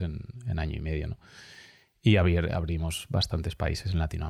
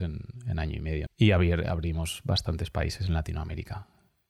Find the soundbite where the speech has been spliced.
second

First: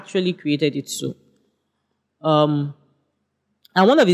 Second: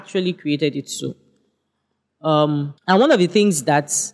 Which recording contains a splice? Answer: second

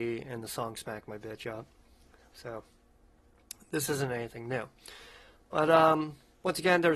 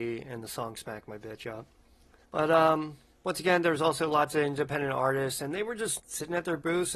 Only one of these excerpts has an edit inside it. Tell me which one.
second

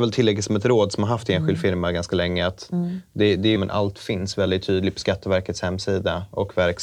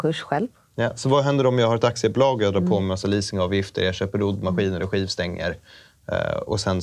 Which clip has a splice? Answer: first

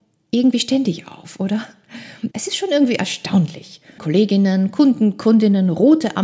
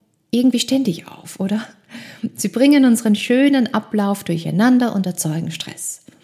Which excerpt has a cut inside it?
first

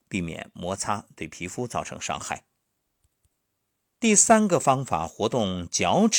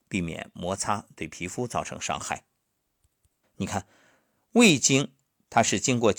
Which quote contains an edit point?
second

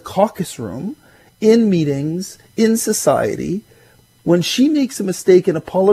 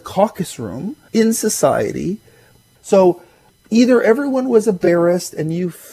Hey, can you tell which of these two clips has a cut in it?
second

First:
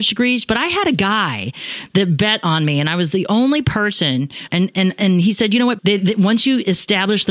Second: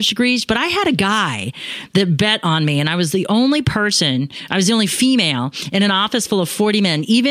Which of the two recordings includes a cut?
first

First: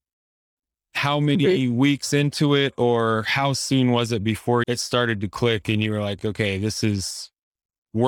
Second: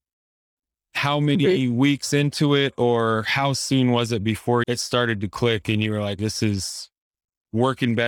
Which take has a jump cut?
second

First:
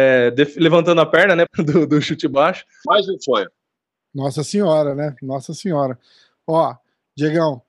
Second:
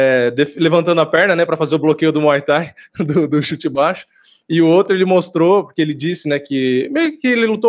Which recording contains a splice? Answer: first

